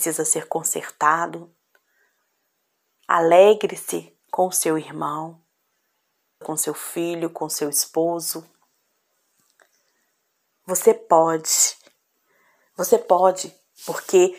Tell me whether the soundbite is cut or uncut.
cut